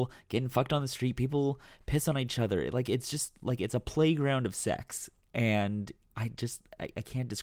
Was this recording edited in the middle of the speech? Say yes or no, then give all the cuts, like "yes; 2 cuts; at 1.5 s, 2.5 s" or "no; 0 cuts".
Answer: no; 0 cuts